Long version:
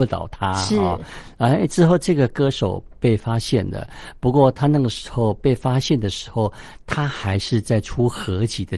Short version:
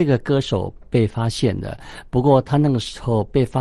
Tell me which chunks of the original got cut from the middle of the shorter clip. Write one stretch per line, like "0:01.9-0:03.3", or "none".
none

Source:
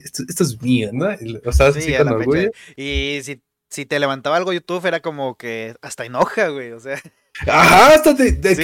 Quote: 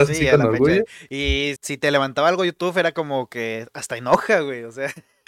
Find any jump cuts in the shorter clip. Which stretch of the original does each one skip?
0:03.2-0:03.6

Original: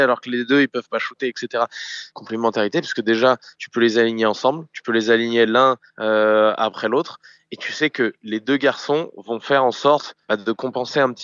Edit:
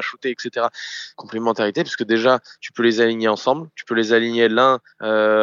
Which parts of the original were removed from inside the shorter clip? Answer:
none

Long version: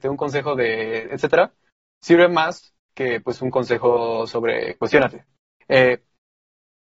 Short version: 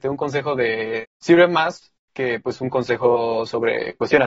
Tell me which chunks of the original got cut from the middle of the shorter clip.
0:01.0-0:01.8

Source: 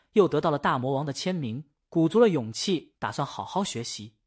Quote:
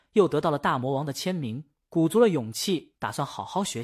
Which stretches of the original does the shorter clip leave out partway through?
none

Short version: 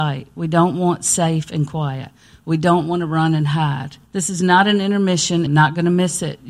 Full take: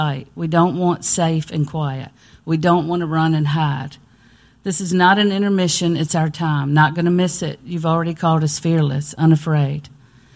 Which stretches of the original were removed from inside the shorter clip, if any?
0:04.1-0:04.6
0:06.0-0:06.7

